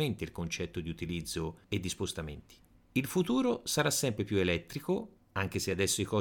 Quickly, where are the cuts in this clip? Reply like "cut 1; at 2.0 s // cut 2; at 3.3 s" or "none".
none